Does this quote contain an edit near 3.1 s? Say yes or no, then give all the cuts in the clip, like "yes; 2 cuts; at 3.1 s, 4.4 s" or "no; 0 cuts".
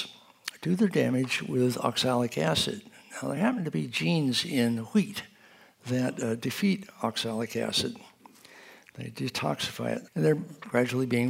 no; 1 cut; at 10.1 s